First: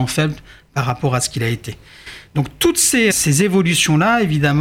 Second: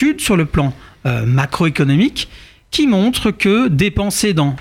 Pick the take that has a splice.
first; 1 cut; at 3.1 s

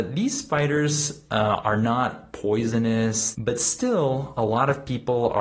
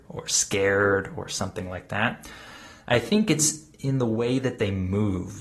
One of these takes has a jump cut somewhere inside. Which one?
first; 1 cut; at 3.3 s

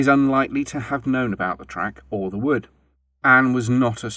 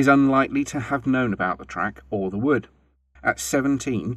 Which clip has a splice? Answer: second; 1 cut; at 3.2 s

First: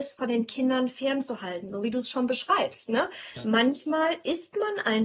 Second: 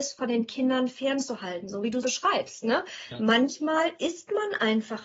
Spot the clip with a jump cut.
second; 1 cut; at 2.0 s

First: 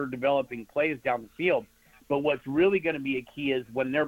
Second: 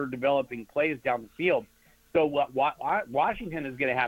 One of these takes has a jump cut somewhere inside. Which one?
first; 1 cut; at 1.9 s

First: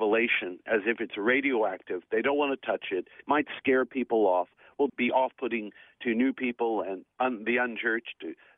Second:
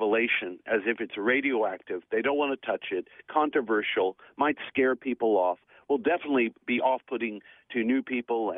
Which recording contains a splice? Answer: first; 2 cuts; at 3.2 s, 4.9 s

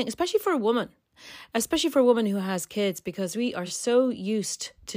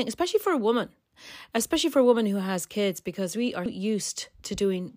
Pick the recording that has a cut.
second; 1 cut; at 3.7 s

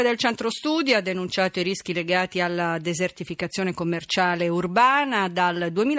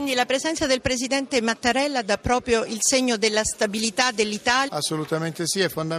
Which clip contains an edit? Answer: second; 1 cut; at 4.7 s

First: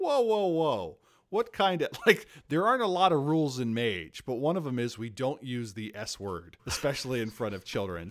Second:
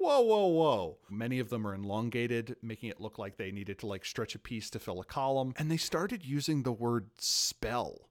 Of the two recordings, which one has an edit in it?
second; 1 cut; at 1.1 s

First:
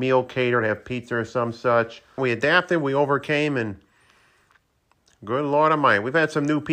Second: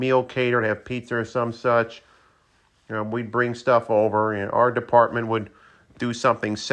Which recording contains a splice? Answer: first; 1 cut; at 2.2 s

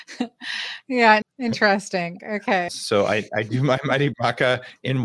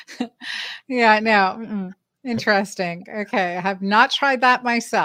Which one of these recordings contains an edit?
first; 2 cuts; at 1.2 s, 2.7 s

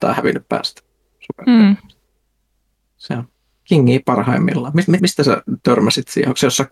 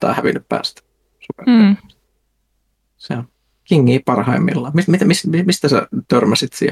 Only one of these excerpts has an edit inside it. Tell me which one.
first; 1 cut; at 5.0 s

